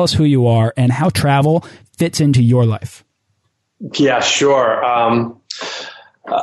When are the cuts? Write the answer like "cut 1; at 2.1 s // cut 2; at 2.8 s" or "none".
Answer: none